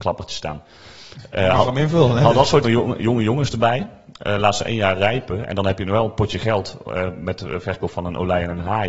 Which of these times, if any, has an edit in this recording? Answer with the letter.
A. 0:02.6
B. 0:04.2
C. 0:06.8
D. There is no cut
A